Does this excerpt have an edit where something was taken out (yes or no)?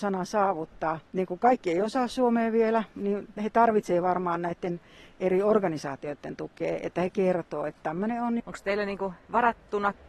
yes